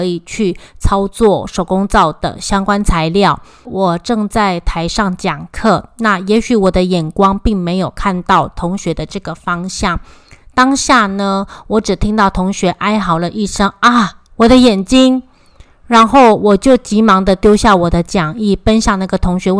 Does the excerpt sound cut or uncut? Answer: cut